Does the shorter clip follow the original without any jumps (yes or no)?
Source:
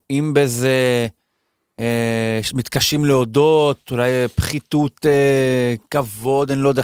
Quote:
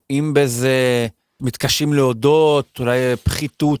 no